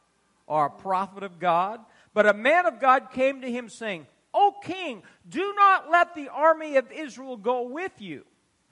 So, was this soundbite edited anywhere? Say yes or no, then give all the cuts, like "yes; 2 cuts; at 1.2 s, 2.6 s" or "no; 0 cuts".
no; 0 cuts